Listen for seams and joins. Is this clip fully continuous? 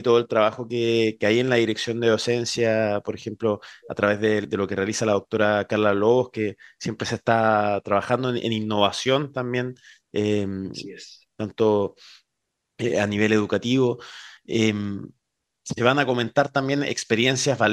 yes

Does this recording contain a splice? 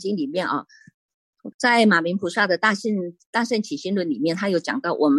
yes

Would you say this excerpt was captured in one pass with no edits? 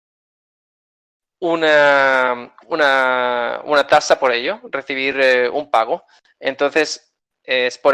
yes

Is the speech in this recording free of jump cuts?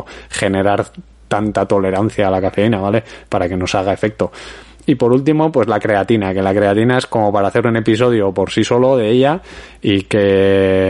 yes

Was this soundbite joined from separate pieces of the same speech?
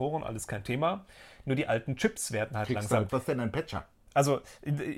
yes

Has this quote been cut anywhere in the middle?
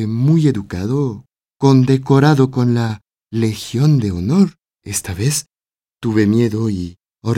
yes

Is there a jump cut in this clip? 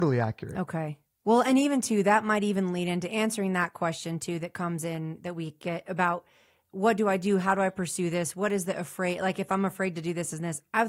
no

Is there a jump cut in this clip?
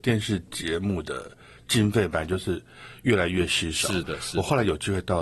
no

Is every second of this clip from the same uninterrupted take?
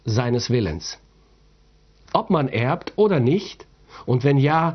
yes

